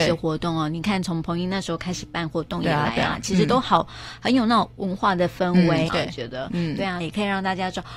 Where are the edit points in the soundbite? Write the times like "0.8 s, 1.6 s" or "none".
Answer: 5.9 s, 7.0 s